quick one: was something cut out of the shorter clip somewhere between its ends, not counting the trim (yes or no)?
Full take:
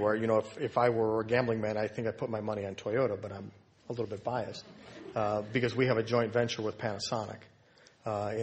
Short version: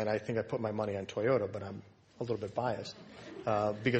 no